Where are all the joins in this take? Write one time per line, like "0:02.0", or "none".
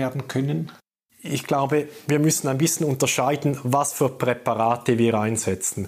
0:01.1